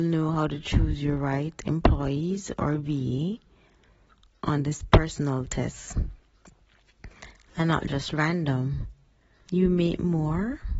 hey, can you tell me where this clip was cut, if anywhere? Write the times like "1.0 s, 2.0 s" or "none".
9.5 s